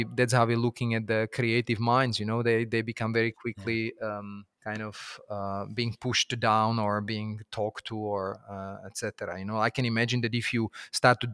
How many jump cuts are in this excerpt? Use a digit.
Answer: 1